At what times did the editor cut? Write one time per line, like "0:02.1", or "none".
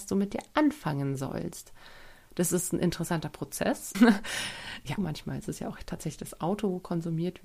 0:03.9
0:05.0